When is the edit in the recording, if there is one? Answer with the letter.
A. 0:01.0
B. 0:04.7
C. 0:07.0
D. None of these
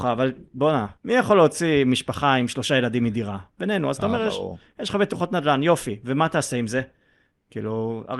A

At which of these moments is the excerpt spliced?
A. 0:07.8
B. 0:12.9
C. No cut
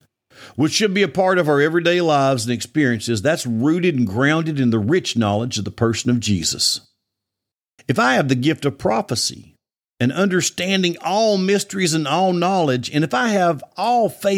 A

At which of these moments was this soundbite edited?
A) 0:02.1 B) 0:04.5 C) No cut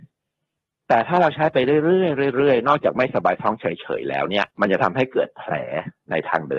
B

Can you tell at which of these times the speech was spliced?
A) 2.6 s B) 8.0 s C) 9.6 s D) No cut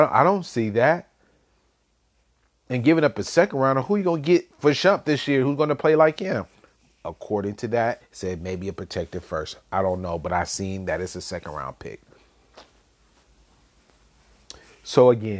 B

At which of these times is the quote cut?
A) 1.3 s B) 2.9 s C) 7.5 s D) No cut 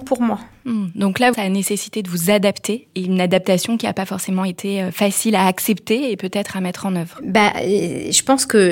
A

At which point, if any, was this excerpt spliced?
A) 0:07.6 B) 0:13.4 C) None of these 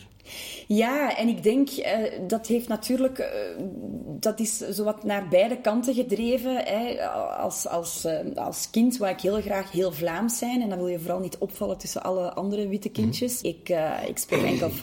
B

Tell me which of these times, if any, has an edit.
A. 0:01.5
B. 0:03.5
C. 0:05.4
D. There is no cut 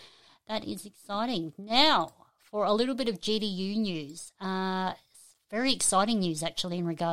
D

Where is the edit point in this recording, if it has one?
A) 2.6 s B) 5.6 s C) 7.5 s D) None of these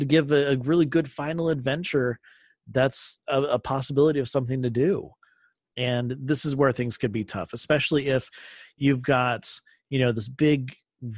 B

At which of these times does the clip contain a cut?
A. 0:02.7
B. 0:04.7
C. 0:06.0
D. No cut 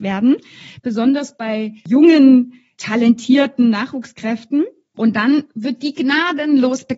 A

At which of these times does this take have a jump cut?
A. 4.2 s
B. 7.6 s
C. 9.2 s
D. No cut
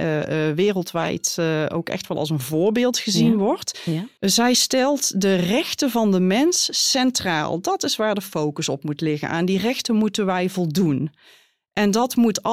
A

